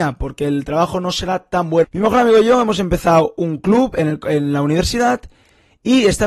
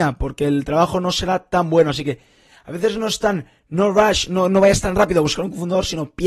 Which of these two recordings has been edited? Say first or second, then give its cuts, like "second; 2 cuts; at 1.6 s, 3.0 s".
first; 1 cut; at 1.8 s